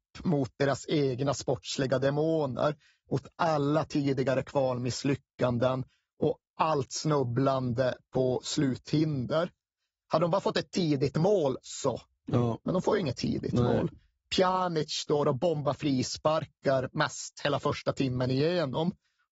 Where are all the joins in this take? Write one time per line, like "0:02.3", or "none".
none

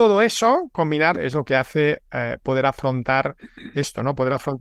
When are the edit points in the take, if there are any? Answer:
0:01.2

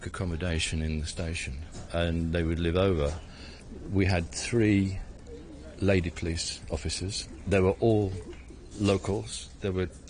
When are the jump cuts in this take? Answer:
none

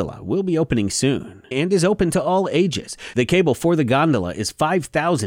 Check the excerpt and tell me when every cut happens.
0:01.5
0:03.1

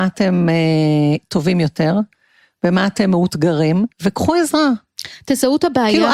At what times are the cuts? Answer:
0:03.9

